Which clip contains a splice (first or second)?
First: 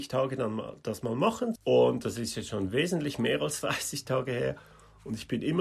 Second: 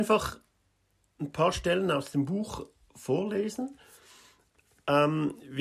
first